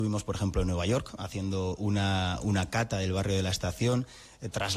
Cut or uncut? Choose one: uncut